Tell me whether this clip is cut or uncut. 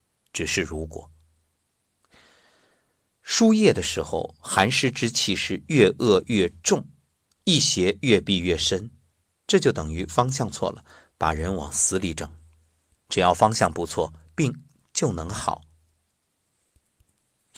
cut